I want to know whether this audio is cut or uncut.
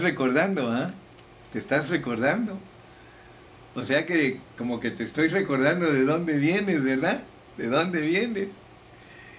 uncut